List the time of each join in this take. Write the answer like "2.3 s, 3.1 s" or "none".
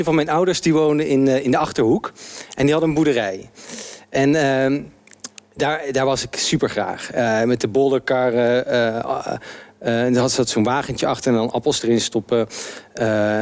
none